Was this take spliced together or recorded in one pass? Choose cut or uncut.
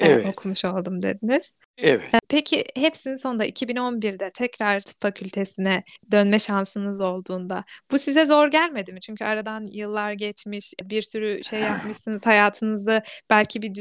uncut